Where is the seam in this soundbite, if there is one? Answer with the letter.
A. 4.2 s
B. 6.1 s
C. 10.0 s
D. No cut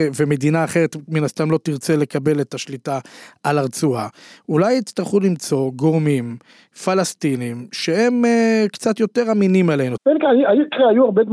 C